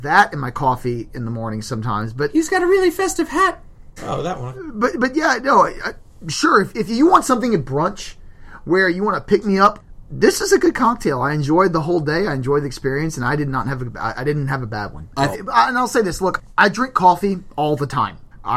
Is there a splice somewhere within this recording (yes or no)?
yes